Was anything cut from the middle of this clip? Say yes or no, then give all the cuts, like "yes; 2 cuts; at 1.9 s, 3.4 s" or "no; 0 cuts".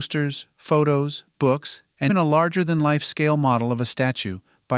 yes; 1 cut; at 2.1 s